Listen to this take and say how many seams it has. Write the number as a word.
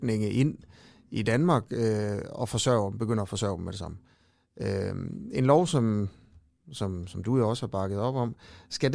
zero